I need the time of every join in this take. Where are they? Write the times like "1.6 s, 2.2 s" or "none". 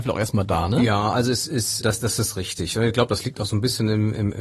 1.8 s